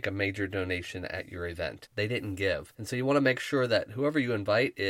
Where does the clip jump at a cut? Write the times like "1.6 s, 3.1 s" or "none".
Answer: 1.9 s